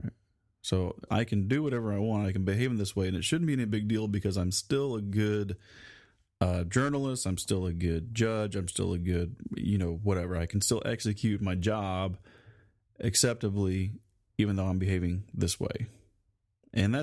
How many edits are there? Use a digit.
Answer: 1